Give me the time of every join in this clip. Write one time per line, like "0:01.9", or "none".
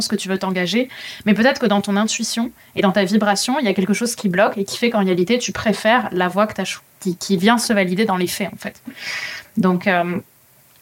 none